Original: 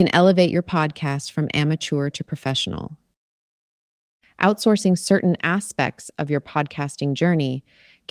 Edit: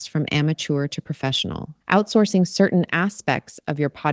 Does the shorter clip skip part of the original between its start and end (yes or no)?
yes